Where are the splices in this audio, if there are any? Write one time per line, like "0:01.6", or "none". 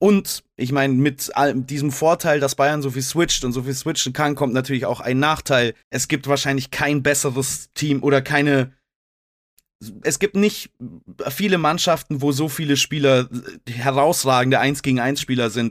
0:05.8
0:10.0

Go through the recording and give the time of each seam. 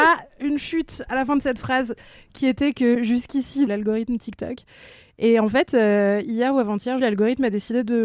0:03.7
0:07.0

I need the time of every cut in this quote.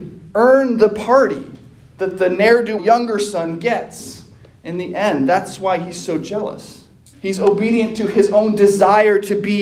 0:02.8
0:07.1

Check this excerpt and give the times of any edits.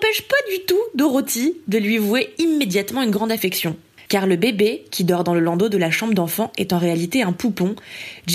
0:04.1

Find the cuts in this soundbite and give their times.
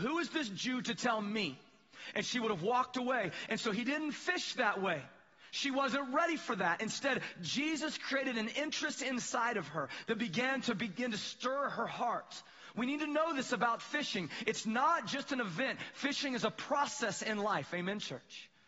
none

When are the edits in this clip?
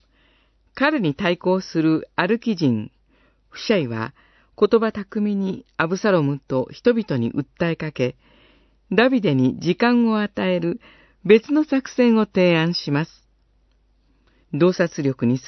0:14.4

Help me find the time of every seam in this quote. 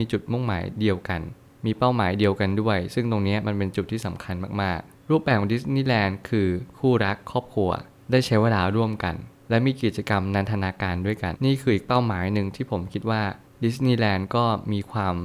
0:11.3

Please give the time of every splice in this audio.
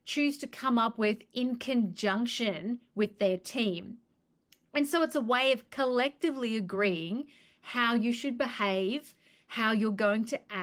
none

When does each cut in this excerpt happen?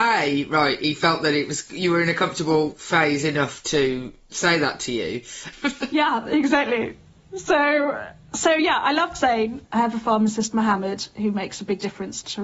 0:05.5
0:09.7

